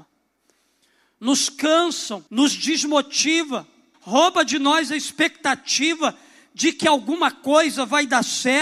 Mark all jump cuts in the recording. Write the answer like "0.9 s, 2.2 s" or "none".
1.1 s, 2.3 s, 3.9 s